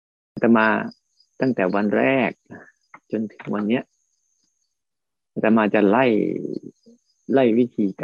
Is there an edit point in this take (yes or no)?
no